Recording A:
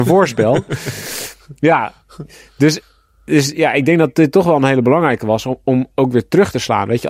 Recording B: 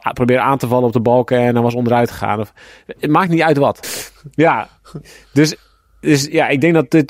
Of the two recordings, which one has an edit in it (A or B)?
B